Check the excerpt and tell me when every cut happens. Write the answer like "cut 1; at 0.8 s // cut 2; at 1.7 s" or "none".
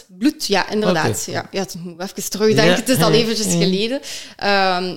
none